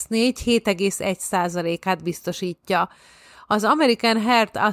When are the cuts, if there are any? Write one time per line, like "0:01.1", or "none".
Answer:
none